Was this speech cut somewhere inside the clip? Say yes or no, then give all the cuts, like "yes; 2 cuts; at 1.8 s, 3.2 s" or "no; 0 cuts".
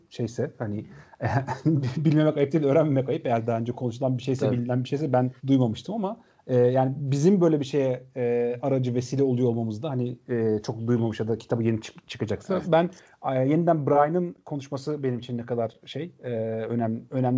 yes; 2 cuts; at 5.4 s, 12.6 s